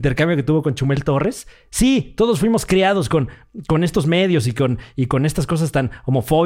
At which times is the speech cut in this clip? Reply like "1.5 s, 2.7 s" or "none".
none